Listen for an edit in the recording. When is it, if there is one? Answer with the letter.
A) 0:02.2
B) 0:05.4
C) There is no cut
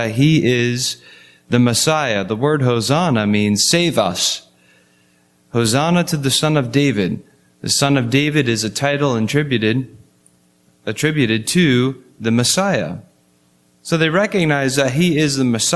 C